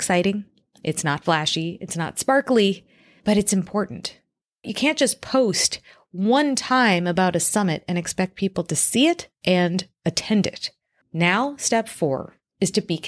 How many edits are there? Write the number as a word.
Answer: three